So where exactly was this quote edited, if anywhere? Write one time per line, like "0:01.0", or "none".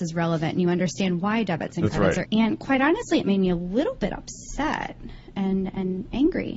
0:02.2